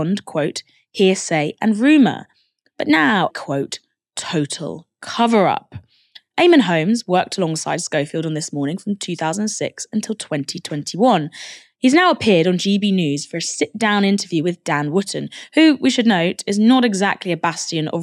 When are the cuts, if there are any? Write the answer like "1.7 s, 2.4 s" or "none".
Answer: 3.3 s